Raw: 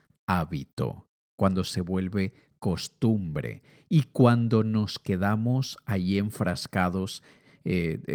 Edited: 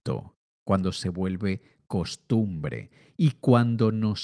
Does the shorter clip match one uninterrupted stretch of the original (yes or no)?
yes